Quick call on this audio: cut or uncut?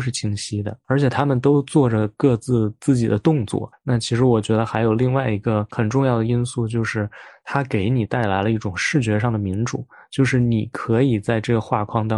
cut